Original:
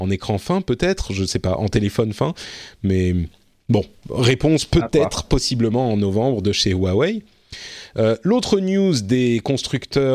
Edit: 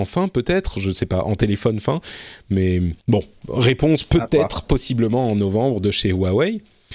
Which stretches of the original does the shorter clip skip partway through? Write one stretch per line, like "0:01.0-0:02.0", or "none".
0:03.3-0:03.6

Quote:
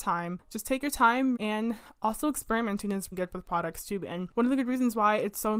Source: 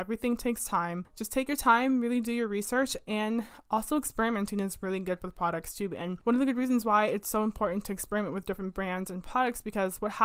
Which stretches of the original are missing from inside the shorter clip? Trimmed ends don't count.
0:02.0-0:03.0
0:04.8-0:05.0

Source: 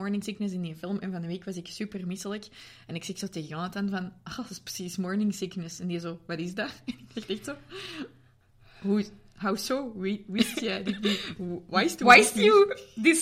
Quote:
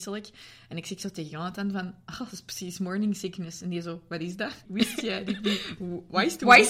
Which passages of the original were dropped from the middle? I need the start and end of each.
0:06.8-0:10.2

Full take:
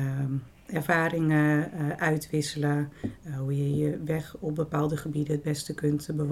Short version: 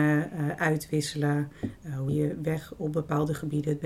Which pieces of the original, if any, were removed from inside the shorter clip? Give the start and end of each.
0:03.5-0:03.7

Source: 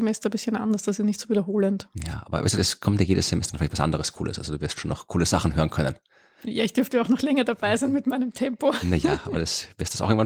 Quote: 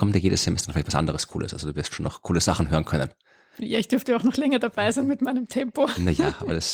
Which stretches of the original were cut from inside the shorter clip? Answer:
none

